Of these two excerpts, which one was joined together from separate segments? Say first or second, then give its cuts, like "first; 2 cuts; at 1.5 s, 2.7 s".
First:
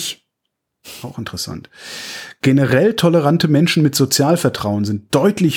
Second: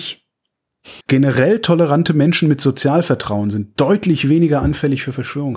second; 1 cut; at 1.0 s